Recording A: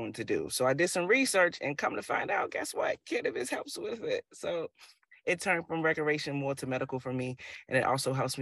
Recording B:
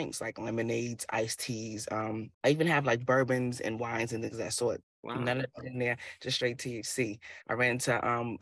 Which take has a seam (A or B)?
B